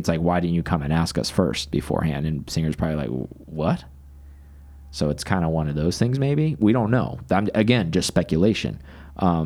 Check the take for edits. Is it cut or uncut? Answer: uncut